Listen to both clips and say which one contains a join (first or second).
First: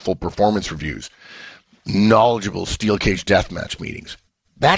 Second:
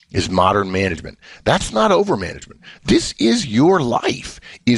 second